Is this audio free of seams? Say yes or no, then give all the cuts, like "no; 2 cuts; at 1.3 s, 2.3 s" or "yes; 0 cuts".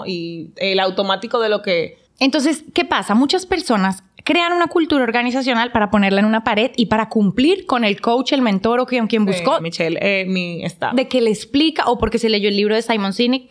no; 3 cuts; at 2.1 s, 9.6 s, 10.9 s